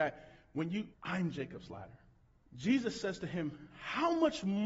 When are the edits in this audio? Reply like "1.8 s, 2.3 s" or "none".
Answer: 0.9 s, 2.5 s

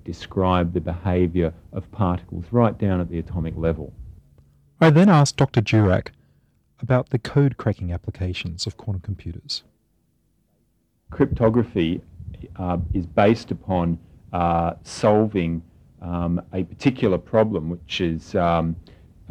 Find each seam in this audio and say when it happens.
none

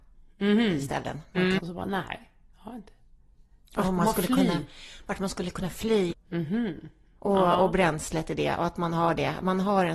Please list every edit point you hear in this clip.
1.6 s, 6.1 s

